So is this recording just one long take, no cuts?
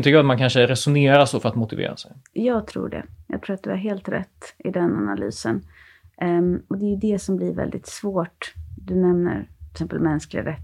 yes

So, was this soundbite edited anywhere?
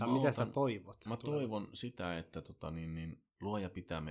no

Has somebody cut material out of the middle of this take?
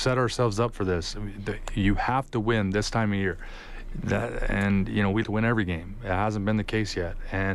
yes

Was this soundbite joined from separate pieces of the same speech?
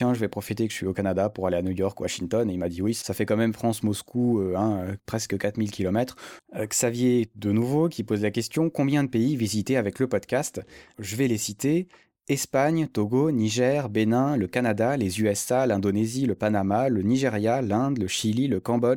yes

